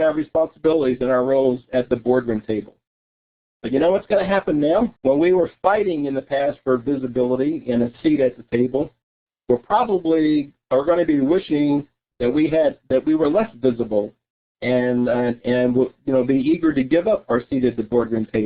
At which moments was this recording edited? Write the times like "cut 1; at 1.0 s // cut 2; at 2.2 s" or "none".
cut 1; at 5.0 s

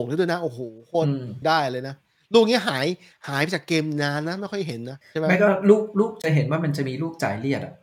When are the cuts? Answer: cut 1; at 1.4 s // cut 2; at 5.0 s

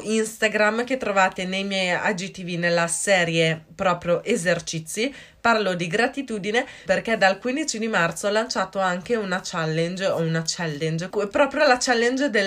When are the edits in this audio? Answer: cut 1; at 6.9 s // cut 2; at 11.1 s

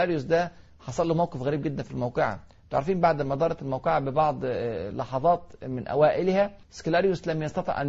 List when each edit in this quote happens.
cut 1; at 6.6 s

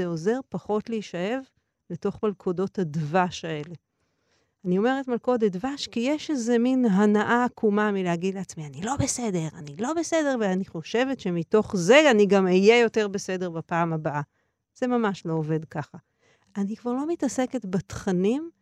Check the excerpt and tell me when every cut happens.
cut 1; at 16.5 s

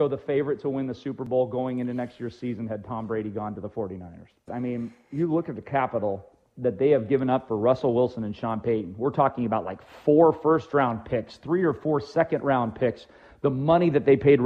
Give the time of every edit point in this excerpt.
cut 1; at 4.5 s

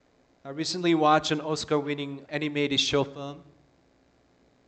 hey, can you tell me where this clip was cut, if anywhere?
cut 1; at 2.3 s

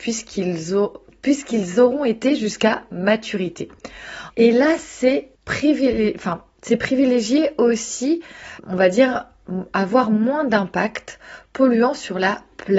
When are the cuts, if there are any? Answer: cut 1; at 4.3 s // cut 2; at 5.4 s // cut 3; at 8.6 s

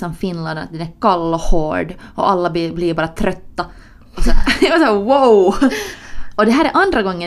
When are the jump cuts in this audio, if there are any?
none

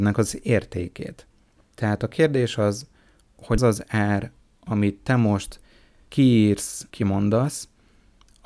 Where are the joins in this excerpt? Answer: cut 1; at 1.6 s // cut 2; at 3.6 s // cut 3; at 6.9 s

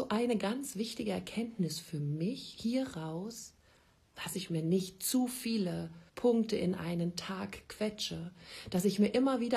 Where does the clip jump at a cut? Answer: cut 1; at 4.1 s // cut 2; at 6.1 s

